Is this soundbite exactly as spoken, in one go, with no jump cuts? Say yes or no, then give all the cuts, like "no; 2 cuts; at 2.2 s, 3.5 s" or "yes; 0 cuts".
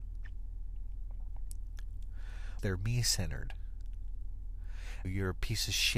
no; 2 cuts; at 2.6 s, 5.0 s